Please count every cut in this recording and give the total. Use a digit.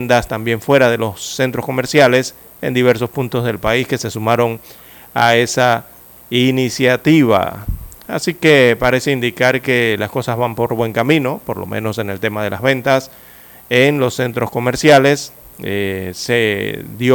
0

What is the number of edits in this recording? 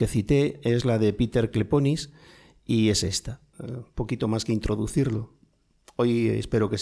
1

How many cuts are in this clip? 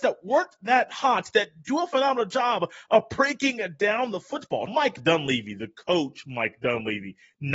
1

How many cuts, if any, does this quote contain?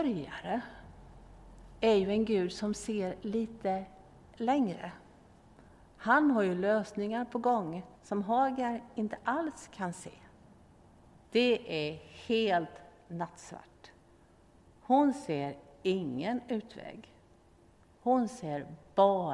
2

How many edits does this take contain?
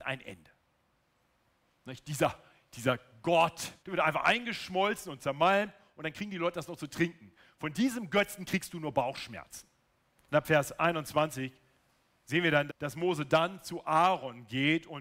3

